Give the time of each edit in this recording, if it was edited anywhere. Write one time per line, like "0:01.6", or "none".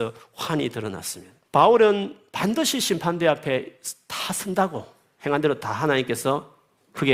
0:01.5

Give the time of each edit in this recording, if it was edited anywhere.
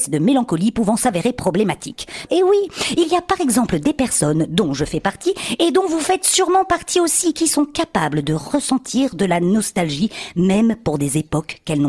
0:02.3

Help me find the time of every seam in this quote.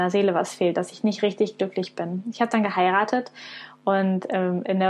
none

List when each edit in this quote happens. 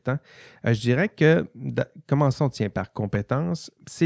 none

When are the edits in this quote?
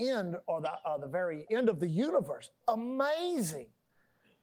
0:01.5

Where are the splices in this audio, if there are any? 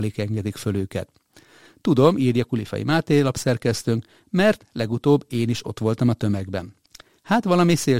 none

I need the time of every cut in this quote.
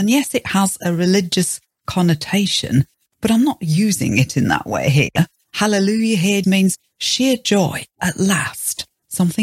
0:06.4

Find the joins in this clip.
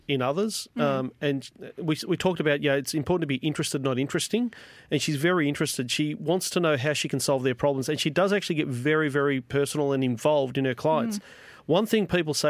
none

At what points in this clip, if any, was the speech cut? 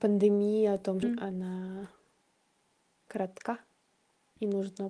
0:01.0

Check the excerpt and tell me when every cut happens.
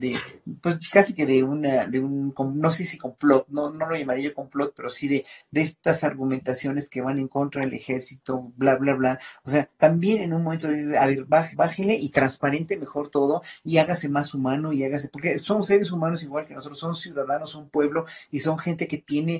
0:11.5

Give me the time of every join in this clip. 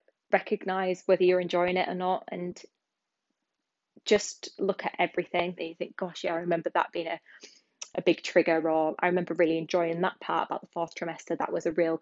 0:05.6

